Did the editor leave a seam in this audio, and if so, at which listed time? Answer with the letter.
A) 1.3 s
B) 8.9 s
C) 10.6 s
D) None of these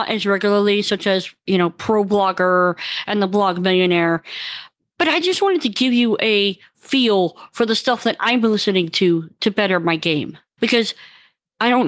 C